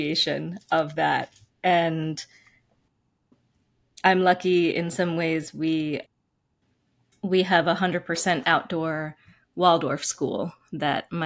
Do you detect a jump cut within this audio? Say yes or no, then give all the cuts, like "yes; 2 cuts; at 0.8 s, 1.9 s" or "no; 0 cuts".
no; 0 cuts